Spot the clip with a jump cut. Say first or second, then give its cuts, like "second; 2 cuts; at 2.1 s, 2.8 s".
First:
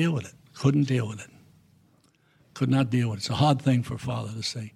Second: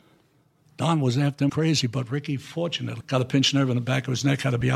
second; 2 cuts; at 1.5 s, 3.0 s